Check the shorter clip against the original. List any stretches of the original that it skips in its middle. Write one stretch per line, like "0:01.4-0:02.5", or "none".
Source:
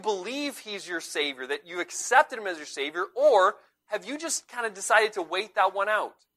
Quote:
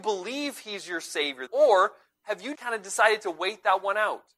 0:01.5-0:03.1
0:04.2-0:04.5